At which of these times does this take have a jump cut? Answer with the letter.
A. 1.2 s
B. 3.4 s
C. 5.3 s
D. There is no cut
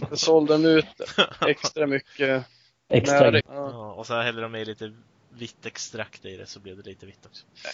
B